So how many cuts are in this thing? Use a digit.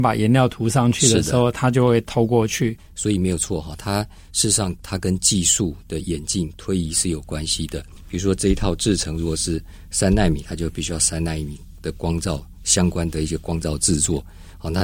1